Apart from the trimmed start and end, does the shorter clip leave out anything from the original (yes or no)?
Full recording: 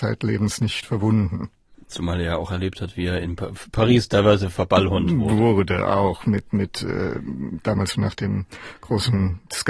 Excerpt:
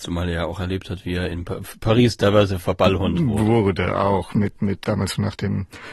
yes